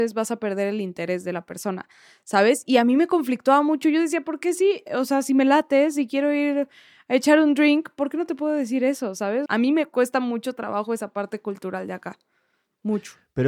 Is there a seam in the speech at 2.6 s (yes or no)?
no